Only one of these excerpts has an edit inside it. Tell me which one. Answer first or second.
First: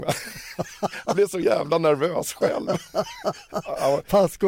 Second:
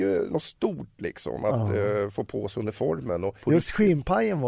second